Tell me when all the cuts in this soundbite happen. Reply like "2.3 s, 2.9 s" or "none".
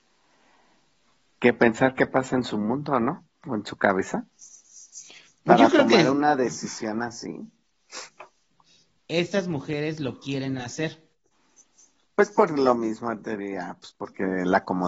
9.0 s, 12.0 s